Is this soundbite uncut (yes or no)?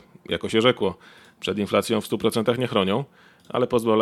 yes